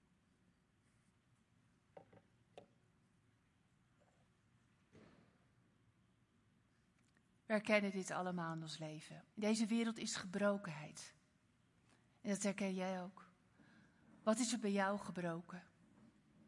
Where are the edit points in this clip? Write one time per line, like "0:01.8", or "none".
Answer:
0:09.3

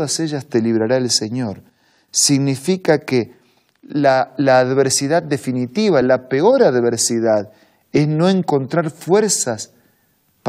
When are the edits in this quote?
0:06.0

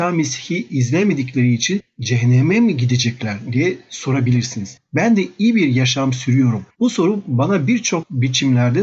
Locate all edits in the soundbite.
0:06.7

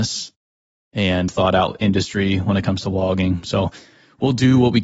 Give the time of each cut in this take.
0:01.3

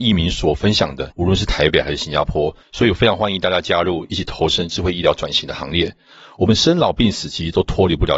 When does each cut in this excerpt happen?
0:01.1

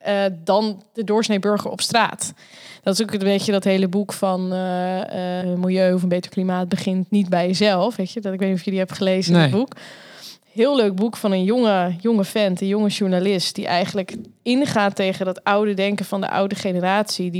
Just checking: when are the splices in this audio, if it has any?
0:05.4

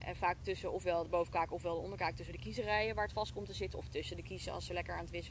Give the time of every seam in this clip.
none

